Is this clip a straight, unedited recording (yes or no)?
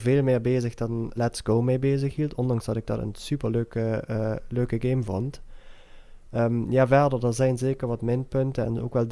no